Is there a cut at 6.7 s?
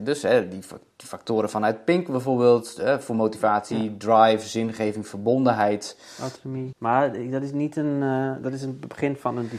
yes; 1 cut; at 6.7 s

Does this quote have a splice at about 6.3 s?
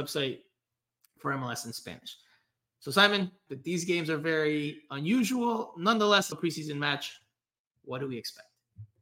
yes; 2 cuts; at 3.5 s, 6.3 s

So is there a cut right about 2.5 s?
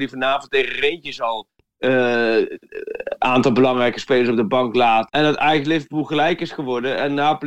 no; 1 cut; at 5.1 s

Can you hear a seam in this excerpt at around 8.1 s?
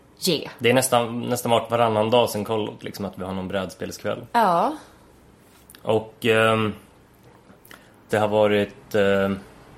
yes; 1 cut; at 8.1 s

